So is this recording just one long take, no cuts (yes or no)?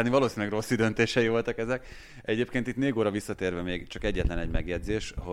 yes